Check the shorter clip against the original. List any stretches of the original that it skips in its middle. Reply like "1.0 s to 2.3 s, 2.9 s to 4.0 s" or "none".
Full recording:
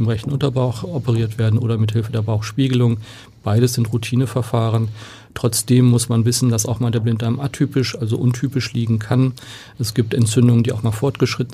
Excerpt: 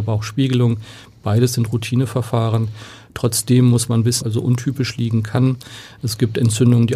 6.4 s to 8.0 s